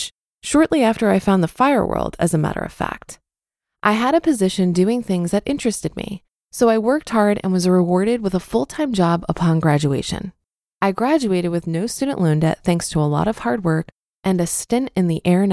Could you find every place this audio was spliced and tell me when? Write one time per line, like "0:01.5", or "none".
0:10.7
0:14.1

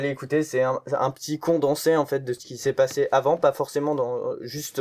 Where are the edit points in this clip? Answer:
none

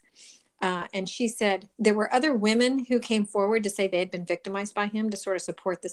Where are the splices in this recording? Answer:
0:01.7

